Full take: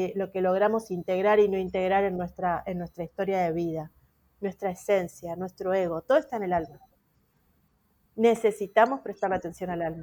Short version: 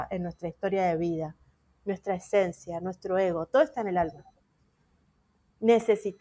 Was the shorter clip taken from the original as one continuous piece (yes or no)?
yes